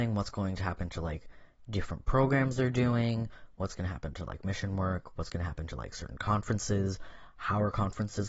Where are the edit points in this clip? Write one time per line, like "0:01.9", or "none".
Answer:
none